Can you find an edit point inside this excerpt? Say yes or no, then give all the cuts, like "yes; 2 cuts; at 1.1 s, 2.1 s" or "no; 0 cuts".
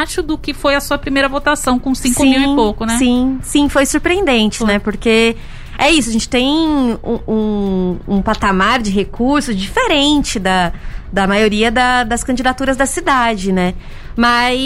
no; 0 cuts